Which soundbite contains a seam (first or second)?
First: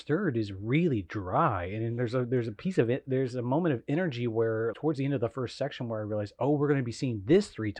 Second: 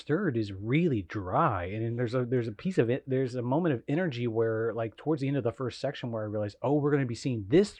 first